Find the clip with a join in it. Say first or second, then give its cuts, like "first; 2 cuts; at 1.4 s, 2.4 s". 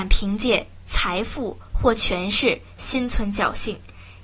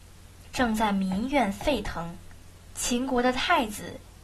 second; 1 cut; at 2.5 s